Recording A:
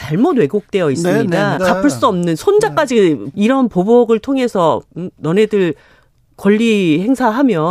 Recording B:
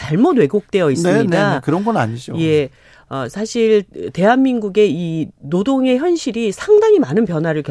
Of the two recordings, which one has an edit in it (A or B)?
A